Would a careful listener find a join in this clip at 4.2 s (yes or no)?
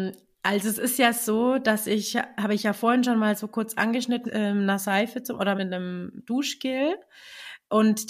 yes